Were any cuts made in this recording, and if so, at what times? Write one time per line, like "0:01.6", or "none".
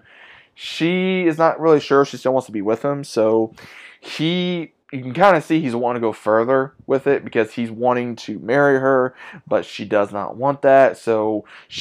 0:04.8